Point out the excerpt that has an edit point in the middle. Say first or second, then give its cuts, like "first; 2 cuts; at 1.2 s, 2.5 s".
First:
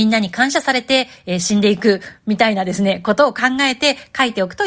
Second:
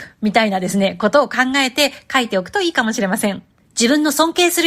second; 1 cut; at 3.6 s